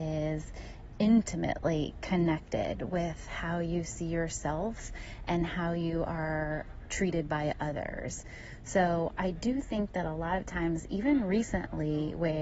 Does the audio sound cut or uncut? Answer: uncut